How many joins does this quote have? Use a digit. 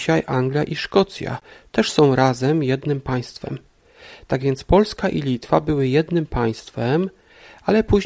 0